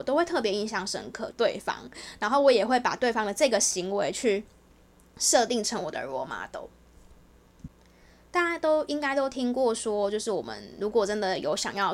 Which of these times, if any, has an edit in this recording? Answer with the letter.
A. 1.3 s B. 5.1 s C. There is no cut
A